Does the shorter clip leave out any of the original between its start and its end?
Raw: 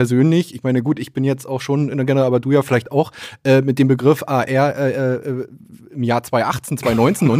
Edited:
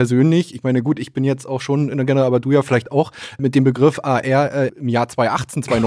yes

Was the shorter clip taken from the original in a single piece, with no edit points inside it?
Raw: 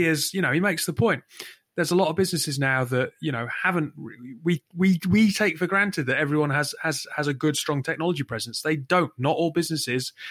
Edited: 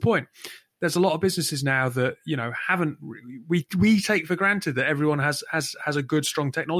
no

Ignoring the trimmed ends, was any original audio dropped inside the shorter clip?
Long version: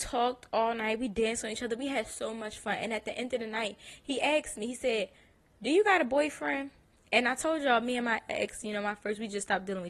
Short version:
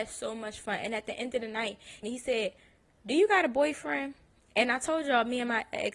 yes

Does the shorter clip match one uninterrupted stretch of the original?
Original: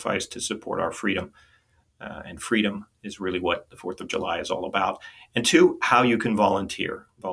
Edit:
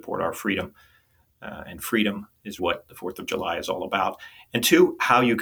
no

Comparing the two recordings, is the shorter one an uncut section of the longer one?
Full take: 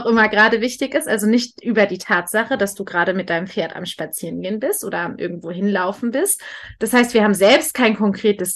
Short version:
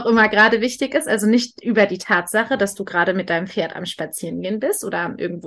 yes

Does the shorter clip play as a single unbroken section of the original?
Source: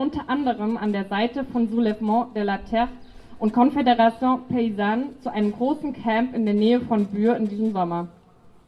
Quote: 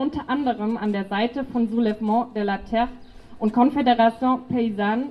yes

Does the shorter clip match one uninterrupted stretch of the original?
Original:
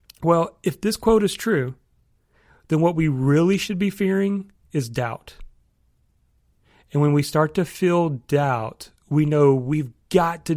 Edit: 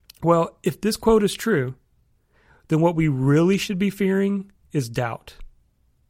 yes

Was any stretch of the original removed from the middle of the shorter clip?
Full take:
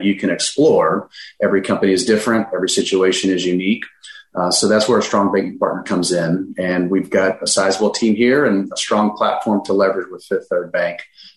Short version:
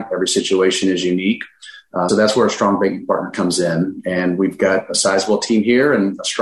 yes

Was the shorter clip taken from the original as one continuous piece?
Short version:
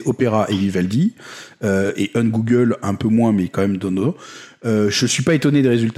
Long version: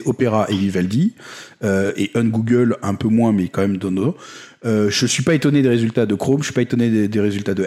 yes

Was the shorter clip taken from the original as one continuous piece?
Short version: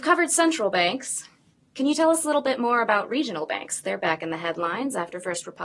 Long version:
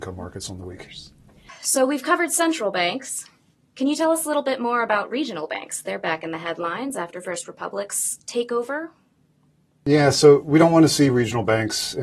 yes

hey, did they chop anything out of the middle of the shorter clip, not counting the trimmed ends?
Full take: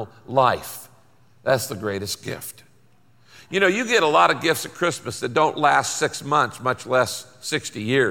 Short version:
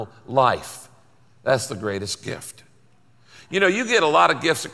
no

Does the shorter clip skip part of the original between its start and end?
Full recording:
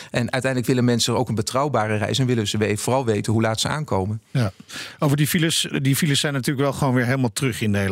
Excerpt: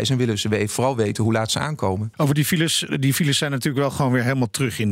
yes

